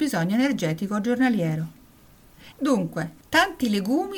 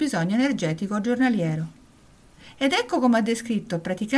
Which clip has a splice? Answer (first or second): first